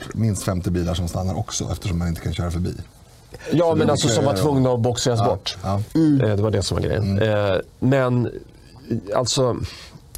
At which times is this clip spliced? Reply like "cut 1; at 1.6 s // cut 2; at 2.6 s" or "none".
none